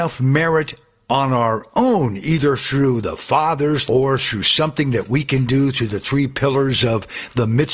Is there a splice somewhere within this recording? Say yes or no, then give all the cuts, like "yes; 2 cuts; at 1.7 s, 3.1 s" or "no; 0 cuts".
yes; 1 cut; at 3.9 s